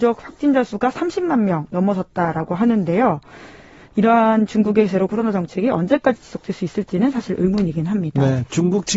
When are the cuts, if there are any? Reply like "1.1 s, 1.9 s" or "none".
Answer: none